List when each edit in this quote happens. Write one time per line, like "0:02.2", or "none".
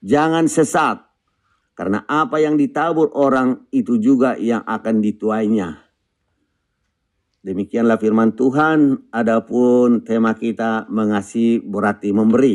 0:01.6

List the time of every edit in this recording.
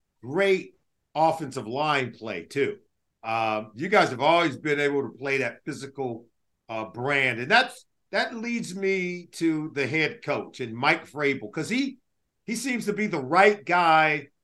none

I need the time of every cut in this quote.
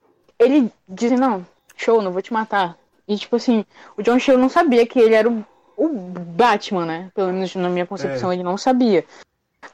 0:01.1

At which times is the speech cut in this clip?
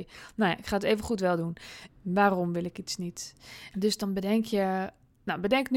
0:01.9
0:03.7

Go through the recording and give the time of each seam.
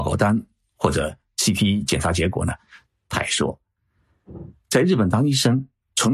0:02.9

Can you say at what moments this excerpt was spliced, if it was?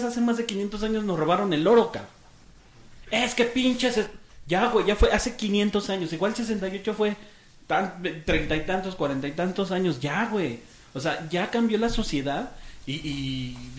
0:12.8

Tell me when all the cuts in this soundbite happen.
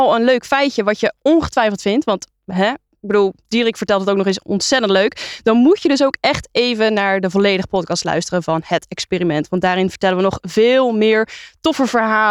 none

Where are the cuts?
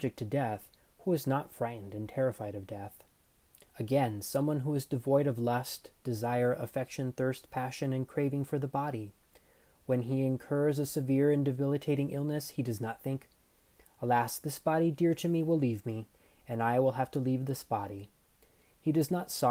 0:03.7

